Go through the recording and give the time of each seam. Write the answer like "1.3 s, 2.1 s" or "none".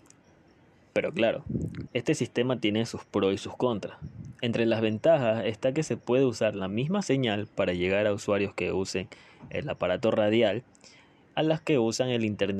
1.9 s